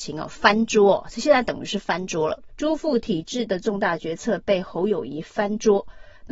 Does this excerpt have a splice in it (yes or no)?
yes